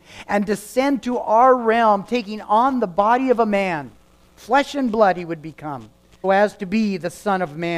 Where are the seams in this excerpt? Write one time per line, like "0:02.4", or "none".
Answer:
0:06.2

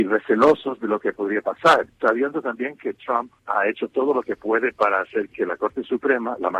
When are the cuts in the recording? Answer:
none

